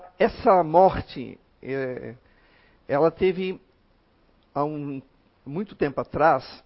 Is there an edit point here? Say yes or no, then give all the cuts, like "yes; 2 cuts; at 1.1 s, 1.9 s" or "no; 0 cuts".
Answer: no; 0 cuts